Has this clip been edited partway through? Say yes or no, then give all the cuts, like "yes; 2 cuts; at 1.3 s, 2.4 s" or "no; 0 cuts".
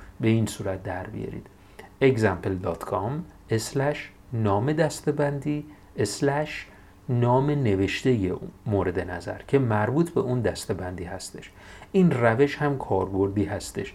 no; 0 cuts